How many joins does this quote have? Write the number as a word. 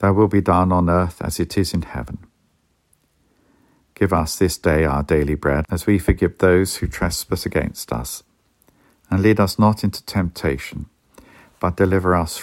one